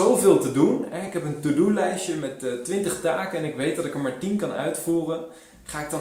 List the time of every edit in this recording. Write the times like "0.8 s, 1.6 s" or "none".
none